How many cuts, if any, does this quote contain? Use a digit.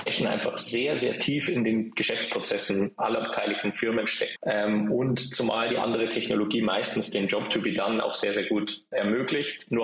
1